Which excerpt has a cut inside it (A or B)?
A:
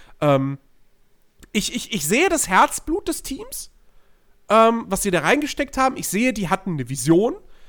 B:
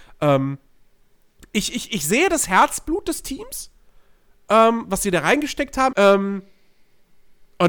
B